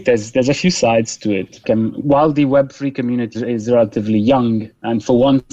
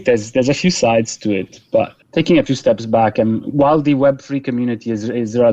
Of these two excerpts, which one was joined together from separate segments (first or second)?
first